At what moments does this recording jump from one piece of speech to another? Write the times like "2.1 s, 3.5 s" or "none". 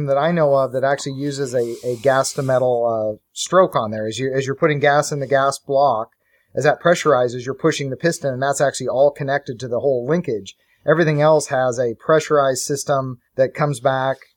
13.3 s